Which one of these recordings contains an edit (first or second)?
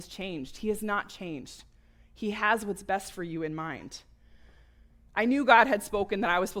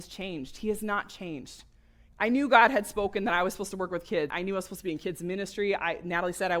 second